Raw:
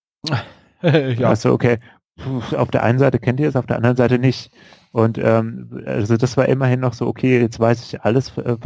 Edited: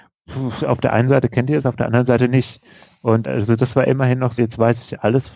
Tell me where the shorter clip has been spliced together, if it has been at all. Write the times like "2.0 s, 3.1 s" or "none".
3.2 s, 4.4 s